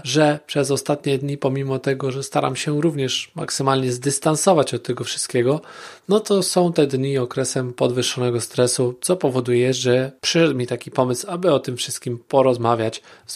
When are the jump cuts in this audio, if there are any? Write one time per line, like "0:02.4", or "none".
none